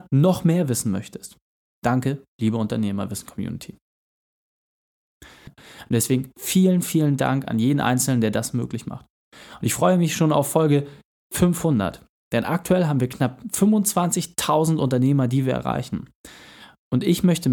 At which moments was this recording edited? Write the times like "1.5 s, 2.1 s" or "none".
1.8 s, 5.5 s